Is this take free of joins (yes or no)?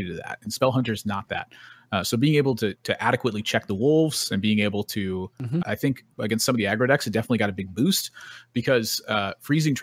no